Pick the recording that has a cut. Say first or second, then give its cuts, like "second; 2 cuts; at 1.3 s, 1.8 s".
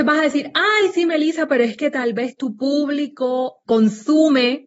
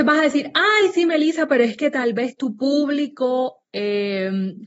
first; 1 cut; at 3.7 s